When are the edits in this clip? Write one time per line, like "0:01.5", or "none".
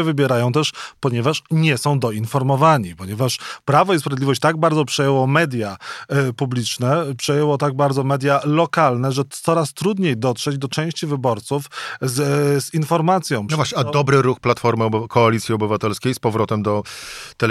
none